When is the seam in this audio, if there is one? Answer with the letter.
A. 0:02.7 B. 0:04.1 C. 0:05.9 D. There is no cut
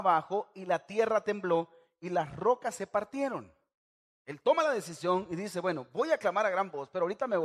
B